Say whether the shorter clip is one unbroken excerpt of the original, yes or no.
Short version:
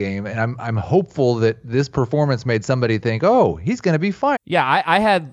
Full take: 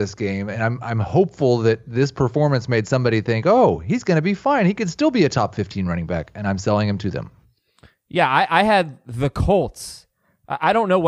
no